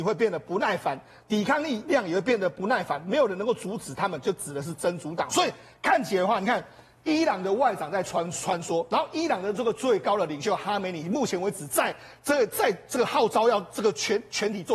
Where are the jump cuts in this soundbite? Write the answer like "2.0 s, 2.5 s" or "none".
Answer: none